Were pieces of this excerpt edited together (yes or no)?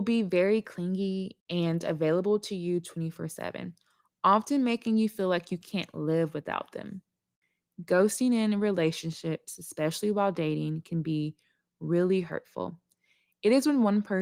no